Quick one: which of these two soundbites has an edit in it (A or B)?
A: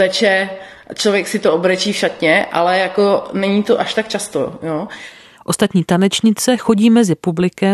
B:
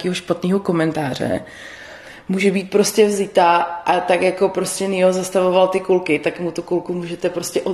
A